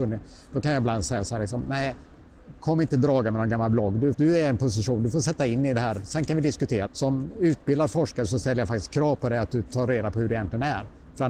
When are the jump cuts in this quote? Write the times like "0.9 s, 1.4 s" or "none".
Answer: 4.1 s, 6.9 s